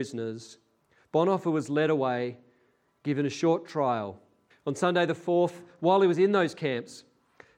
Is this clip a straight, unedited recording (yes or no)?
no